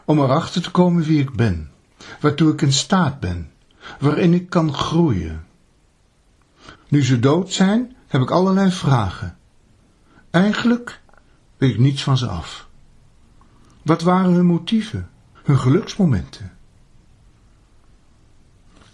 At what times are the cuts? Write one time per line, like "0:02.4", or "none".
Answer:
0:06.8
0:15.4